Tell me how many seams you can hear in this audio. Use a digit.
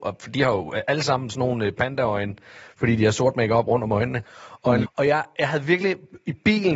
1